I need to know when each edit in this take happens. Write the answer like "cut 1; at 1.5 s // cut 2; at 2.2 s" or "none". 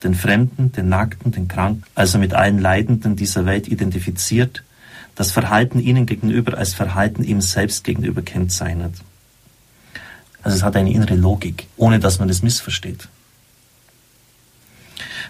cut 1; at 1.8 s // cut 2; at 10.4 s // cut 3; at 11.7 s